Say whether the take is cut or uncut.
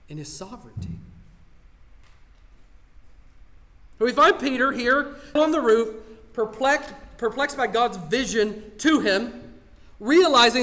cut